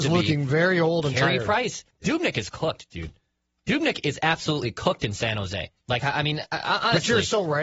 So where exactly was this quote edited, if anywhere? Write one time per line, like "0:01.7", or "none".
0:01.9
0:05.8